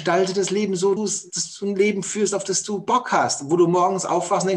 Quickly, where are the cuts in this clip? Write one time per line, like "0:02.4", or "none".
0:01.0